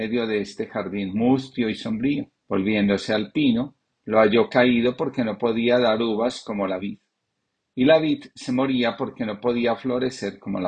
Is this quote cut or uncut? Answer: cut